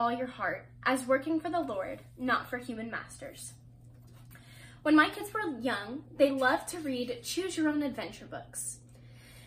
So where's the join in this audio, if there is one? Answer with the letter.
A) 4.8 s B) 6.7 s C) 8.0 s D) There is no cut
D